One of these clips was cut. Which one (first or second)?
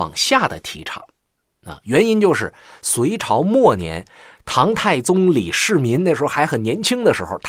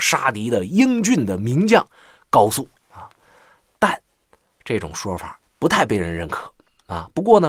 second